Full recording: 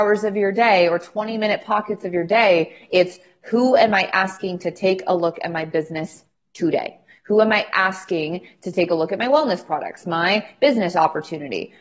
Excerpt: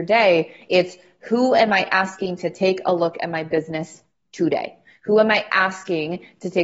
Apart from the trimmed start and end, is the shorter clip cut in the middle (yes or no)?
no